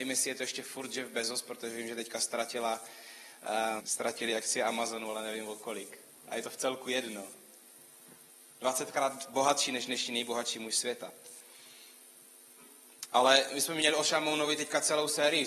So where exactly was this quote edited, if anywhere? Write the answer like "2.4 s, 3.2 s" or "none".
3.8 s

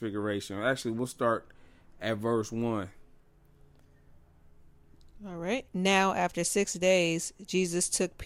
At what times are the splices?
5.7 s

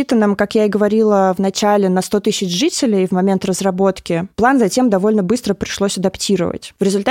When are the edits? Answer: none

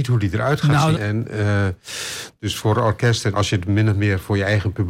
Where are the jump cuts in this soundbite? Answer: 0.9 s, 3.3 s

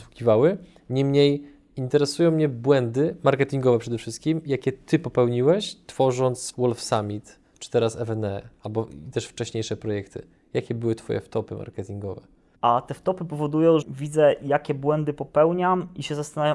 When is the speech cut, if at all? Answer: 6.5 s, 12.6 s, 13.8 s

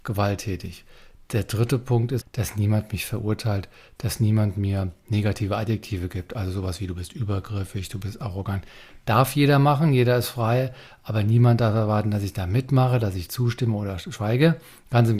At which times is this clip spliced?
2.2 s

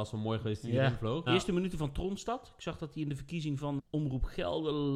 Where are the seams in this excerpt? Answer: 1.3 s, 3.8 s

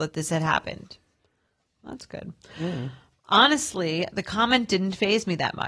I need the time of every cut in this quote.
none

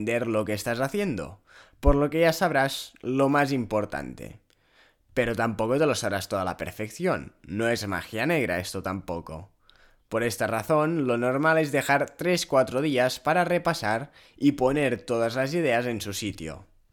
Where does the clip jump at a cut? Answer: none

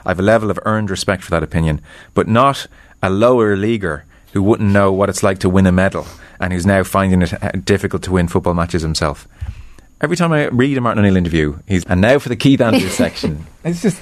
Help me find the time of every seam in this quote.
11.8 s

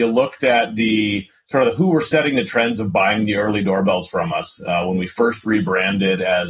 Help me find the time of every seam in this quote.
none

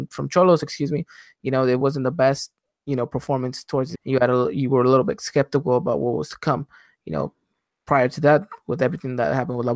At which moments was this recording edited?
3.9 s

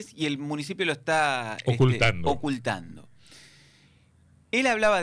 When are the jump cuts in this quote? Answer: none

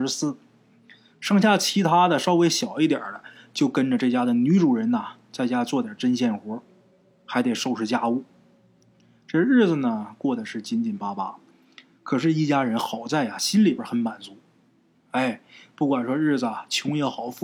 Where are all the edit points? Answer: none

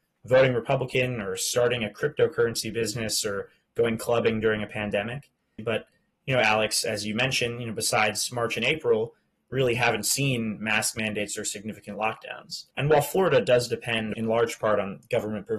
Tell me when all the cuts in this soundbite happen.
5.6 s, 12.7 s, 14.1 s

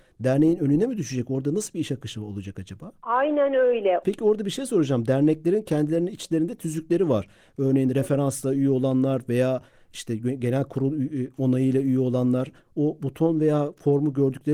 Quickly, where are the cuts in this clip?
4.0 s

